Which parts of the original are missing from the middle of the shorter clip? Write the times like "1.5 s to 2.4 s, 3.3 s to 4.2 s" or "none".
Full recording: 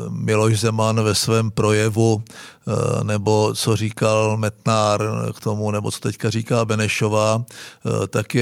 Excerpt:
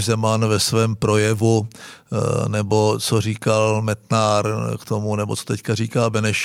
none